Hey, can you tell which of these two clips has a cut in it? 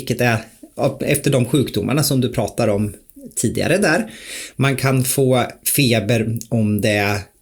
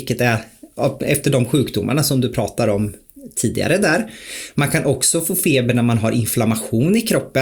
first; 1 cut; at 4.5 s

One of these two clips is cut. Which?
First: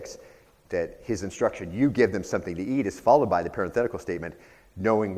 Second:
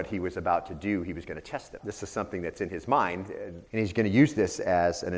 second; 2 cuts; at 1.8 s, 3.7 s

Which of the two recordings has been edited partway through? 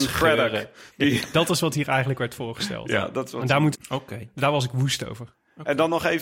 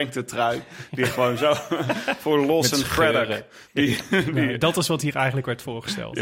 first; 2 cuts; at 1.3 s, 3.7 s

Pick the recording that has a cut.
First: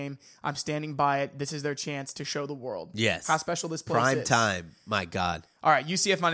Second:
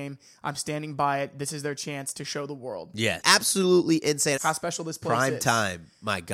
second; 2 cuts; at 3.2 s, 4.4 s

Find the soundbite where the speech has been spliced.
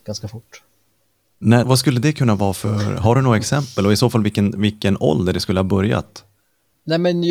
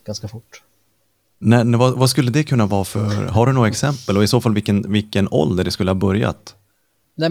first; 1 cut; at 1.6 s

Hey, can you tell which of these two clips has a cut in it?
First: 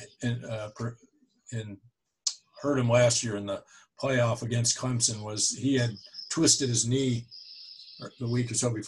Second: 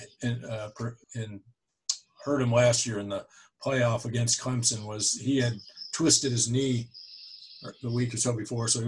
second; 1 cut; at 1.0 s

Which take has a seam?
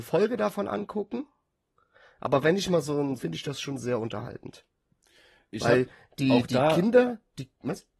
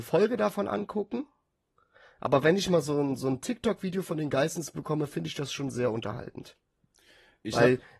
first; 1 cut; at 3.2 s

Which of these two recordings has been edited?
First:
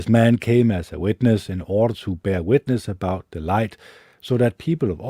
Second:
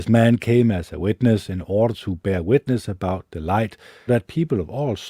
second; 1 cut; at 4.1 s

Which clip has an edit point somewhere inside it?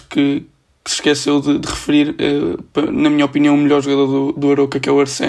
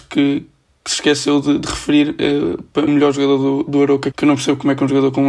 second; 2 cuts; at 2.9 s, 4.1 s

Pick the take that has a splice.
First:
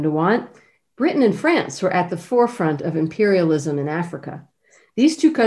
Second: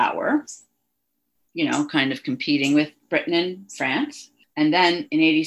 second; 1 cut; at 4.4 s

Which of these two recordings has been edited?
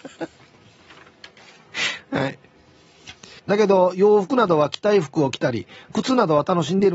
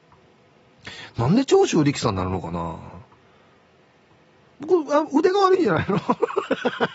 first; 1 cut; at 3.4 s

